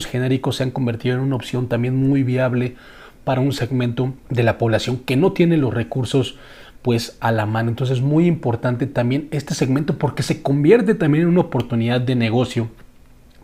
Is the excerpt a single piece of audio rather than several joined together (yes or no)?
no